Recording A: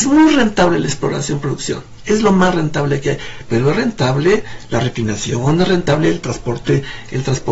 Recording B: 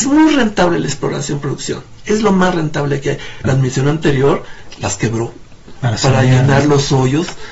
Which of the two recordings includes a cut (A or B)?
B